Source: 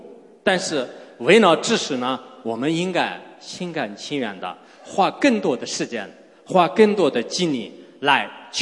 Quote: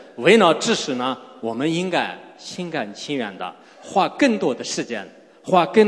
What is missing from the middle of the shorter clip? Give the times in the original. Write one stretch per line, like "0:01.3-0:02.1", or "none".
none